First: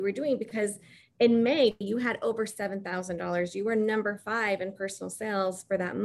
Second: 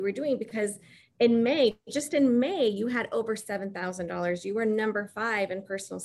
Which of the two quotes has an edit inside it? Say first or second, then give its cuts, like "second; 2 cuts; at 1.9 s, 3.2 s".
first; 1 cut; at 1.8 s